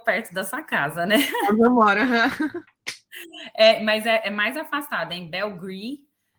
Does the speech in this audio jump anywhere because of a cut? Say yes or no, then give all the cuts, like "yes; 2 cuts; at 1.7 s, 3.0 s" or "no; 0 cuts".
no; 0 cuts